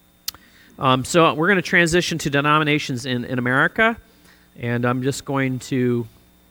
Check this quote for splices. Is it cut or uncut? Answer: uncut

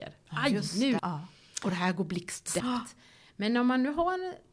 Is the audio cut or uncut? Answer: cut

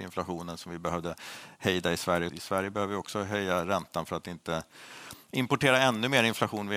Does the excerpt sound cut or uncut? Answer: cut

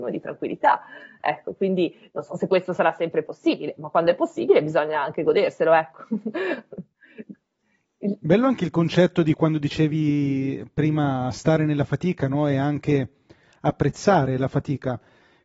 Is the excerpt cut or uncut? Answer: uncut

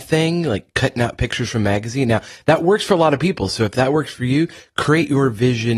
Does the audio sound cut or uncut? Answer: uncut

